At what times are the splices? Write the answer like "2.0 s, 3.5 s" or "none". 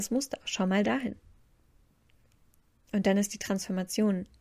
none